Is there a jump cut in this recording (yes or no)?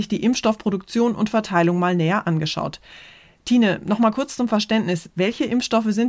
no